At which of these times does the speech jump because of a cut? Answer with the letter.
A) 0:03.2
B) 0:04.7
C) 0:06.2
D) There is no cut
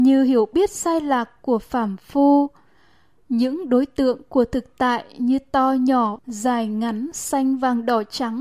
C